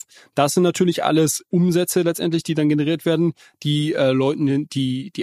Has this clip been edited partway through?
no; 0 cuts

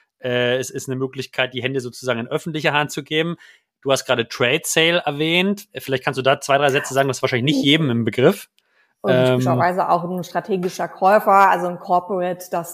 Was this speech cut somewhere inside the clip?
no; 0 cuts

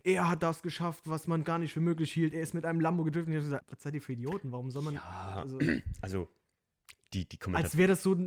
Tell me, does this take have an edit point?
yes; 1 cut; at 3.6 s

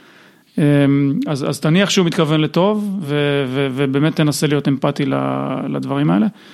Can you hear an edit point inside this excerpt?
no; 0 cuts

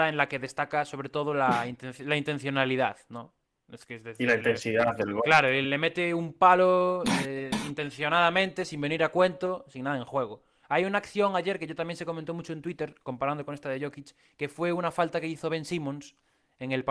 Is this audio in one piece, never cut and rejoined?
no; 1 cut; at 5.6 s

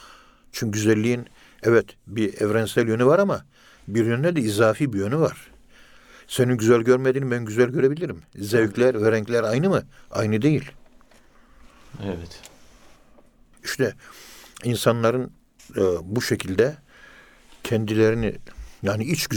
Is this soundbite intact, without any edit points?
yes; 0 cuts

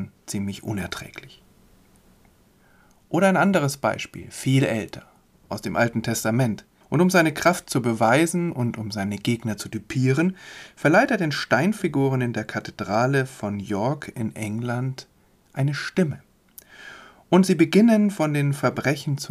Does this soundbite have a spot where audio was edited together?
yes; 1 cut; at 6.8 s

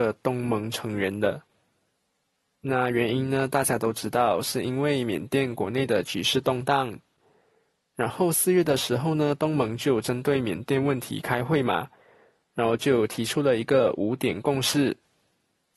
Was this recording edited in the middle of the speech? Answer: no; 0 cuts

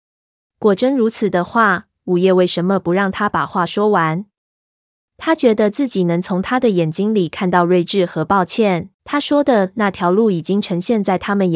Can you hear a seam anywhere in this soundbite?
yes; 1 cut; at 9.0 s

